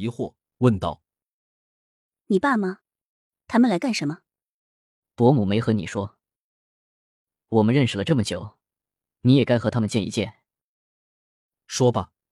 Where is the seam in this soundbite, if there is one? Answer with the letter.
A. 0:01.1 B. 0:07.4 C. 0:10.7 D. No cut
B